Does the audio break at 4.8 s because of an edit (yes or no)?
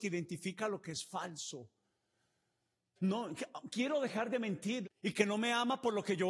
yes